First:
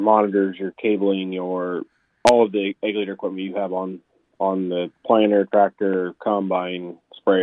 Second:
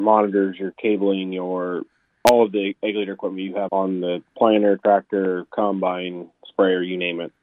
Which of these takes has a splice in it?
second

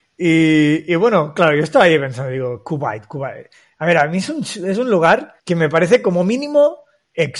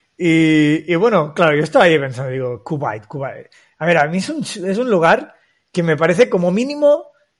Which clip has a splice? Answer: first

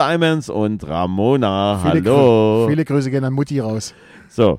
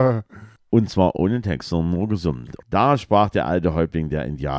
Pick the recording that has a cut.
second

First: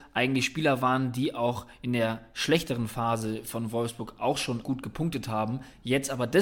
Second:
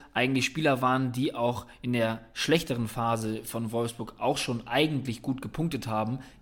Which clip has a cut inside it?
first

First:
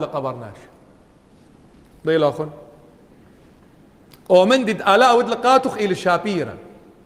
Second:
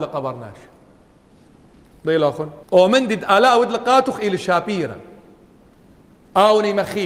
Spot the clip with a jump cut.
second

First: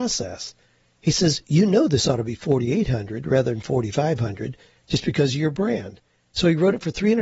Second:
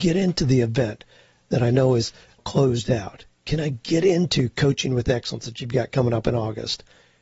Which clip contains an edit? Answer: second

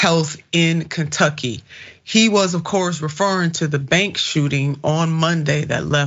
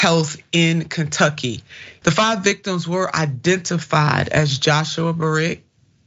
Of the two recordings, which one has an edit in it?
second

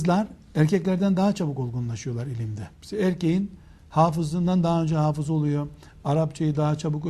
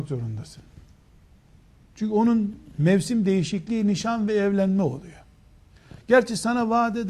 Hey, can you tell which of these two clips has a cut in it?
first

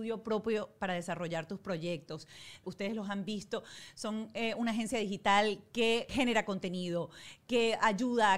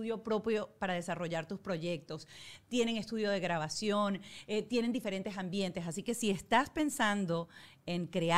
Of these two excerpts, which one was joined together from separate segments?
first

